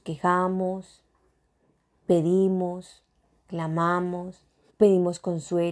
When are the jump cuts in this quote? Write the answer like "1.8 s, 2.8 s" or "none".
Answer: 4.7 s

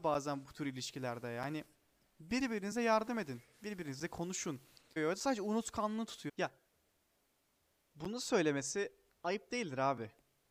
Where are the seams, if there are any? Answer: 5.0 s, 6.3 s

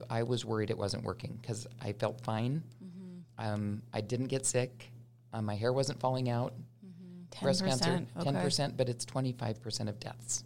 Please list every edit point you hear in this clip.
7.3 s

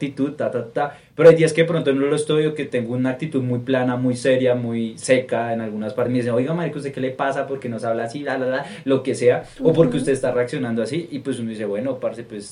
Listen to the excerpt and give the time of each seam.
none

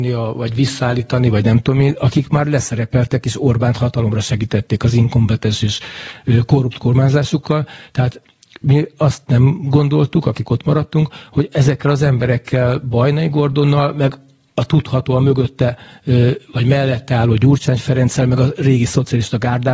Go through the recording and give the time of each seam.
none

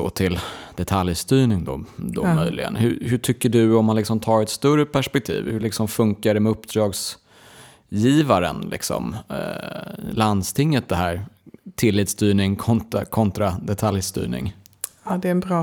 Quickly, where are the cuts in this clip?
none

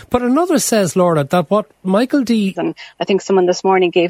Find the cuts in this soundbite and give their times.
2.5 s

